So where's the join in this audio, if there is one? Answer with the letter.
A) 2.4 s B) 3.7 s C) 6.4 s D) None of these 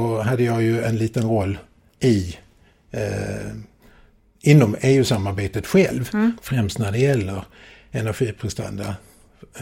C